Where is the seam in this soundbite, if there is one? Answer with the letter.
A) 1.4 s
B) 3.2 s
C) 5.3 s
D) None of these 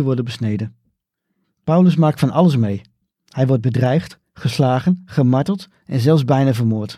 A